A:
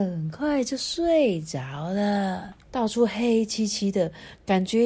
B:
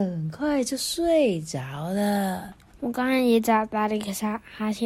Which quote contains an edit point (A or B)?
A